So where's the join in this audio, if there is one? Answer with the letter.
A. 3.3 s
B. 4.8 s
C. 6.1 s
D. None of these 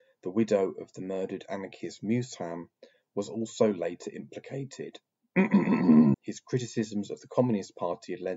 C